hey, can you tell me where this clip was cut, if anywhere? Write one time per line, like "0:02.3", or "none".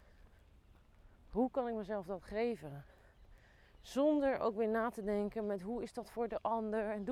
none